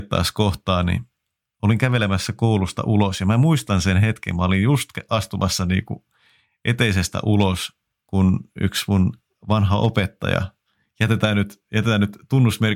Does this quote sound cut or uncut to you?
uncut